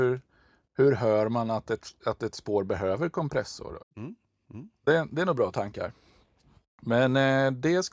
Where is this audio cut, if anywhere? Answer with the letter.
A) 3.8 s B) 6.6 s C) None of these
A